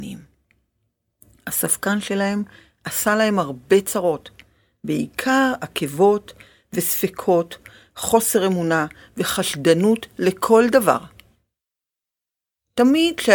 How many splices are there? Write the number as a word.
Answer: zero